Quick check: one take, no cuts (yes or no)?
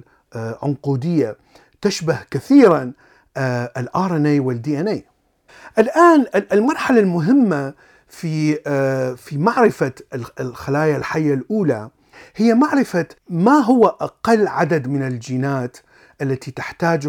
yes